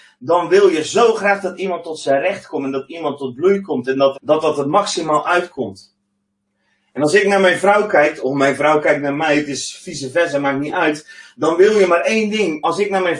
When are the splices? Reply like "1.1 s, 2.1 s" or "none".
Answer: 4.1 s